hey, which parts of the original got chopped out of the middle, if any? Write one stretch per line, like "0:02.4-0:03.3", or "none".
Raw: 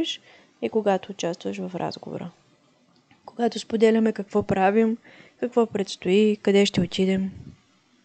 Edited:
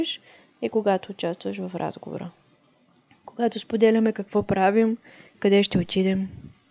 0:05.3-0:06.4